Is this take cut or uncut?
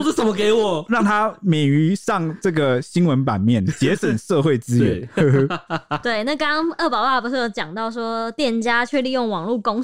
uncut